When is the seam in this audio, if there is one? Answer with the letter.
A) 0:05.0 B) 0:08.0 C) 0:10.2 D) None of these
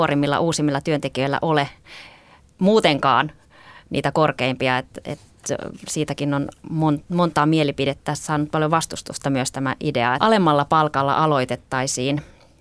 C